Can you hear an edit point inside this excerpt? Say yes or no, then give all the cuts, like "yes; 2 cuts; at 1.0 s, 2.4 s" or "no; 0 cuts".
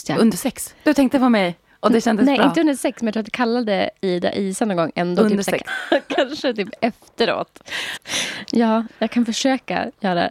yes; 2 cuts; at 5.7 s, 8.0 s